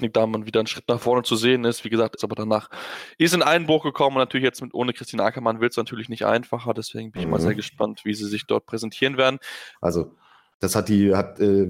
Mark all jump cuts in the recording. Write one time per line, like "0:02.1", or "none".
0:02.2
0:09.7